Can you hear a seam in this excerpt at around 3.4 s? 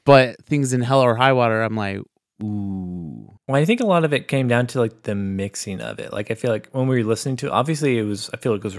yes; 1 cut; at 3.4 s

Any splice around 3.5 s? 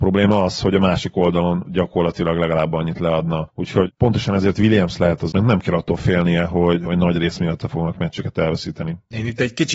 no; 1 cut; at 5.3 s

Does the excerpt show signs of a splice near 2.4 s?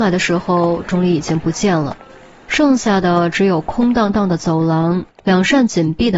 no; 1 cut; at 5.1 s

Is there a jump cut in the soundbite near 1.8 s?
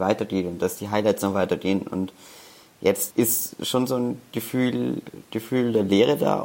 no; 1 cut; at 3.1 s

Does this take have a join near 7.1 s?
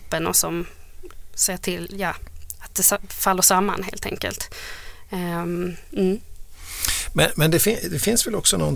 no; 0 cuts

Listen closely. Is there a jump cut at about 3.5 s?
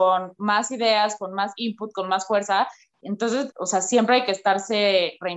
yes; 1 cut; at 3.5 s

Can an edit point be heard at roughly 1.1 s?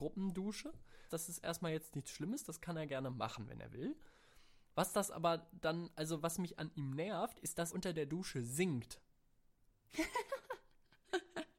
yes; 2 cuts; at 1.1 s, 7.7 s

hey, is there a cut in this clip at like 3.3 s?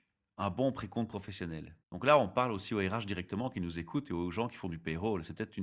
no; 1 cut; at 1.8 s

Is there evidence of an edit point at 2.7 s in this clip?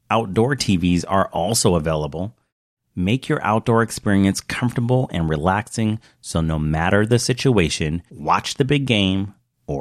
no; 1 cut; at 8.1 s

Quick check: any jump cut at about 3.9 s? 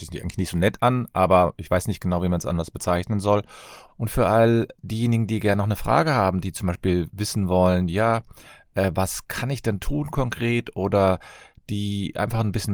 yes; 1 cut; at 3.9 s

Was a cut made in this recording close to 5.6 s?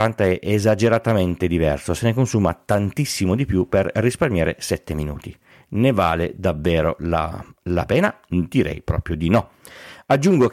no; 1 cut; at 7.5 s

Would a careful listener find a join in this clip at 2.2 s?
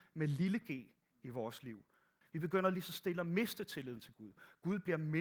yes; 1 cut; at 2.2 s

